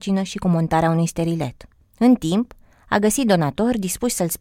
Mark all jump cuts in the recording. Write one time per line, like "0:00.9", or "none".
none